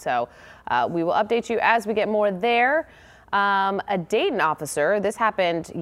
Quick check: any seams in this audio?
no; 0 cuts

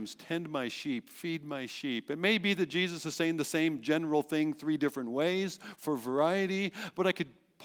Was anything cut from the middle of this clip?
no; 0 cuts

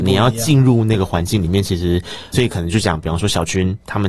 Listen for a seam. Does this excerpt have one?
yes; 1 cut; at 2.3 s

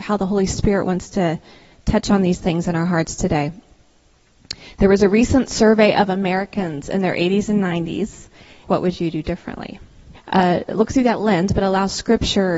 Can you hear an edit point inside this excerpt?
yes; 2 cuts; at 8.6 s, 10.1 s

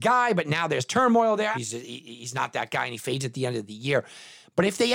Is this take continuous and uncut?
no; 1 cut; at 1.5 s

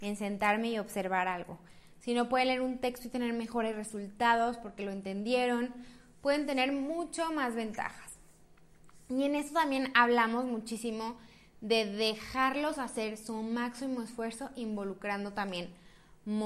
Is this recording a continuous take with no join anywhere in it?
yes; 0 cuts

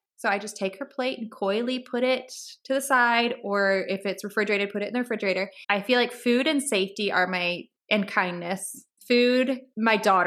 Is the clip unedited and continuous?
no; 2 cuts; at 5.6 s, 9.0 s

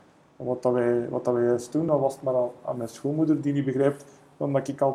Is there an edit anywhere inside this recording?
no; 0 cuts

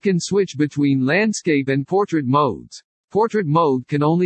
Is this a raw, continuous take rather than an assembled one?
yes; 0 cuts

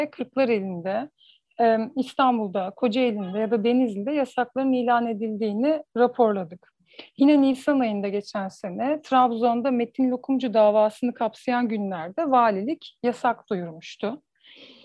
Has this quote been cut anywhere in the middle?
no; 0 cuts

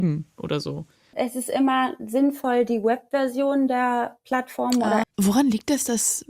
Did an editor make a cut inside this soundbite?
yes; 1 cut; at 5.0 s

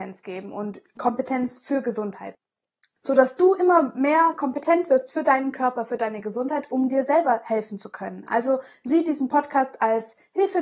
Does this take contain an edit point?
no; 0 cuts

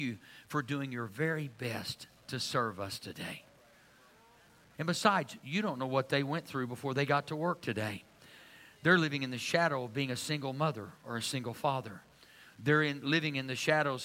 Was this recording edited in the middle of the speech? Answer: yes; 1 cut; at 4.7 s

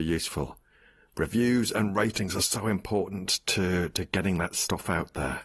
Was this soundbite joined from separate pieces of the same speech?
no; 0 cuts

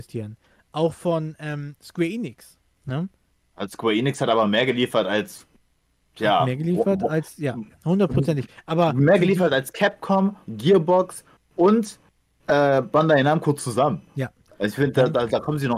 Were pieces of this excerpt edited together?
yes; 1 cut; at 10.4 s

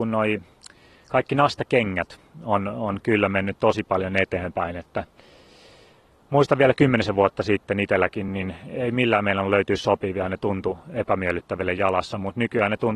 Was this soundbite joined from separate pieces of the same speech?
no; 0 cuts

